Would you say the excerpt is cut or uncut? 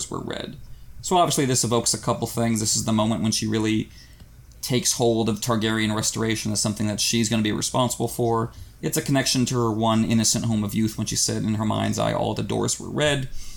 uncut